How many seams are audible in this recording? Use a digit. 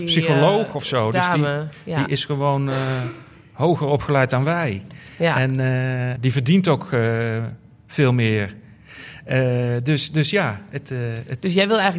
1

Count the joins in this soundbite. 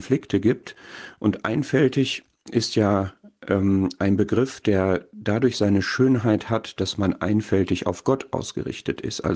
0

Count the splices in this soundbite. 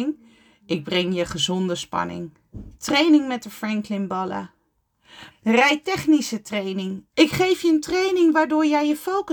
3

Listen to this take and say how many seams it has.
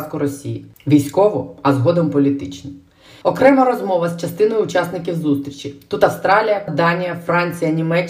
2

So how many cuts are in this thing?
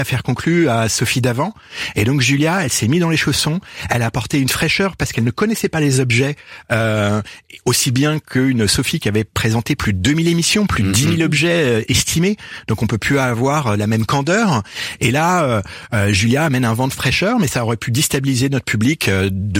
0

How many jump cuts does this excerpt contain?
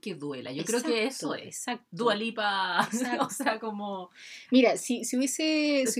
0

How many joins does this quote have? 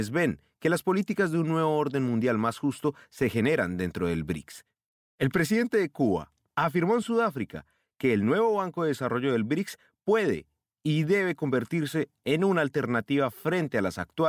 1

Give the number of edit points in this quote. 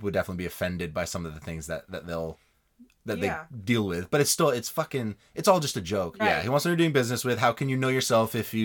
1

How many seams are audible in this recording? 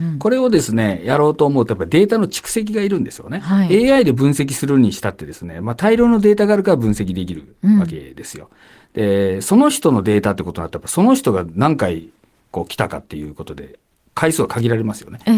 0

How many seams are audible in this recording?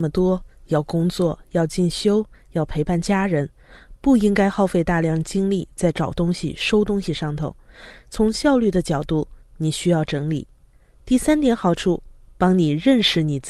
0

